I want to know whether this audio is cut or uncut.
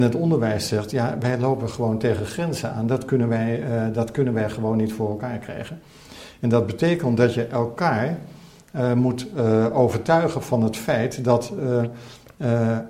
uncut